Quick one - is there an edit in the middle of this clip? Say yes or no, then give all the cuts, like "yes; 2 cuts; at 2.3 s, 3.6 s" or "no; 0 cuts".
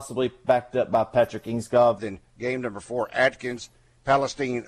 yes; 1 cut; at 2.0 s